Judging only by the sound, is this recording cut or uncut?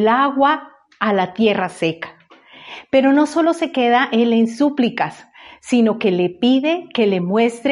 uncut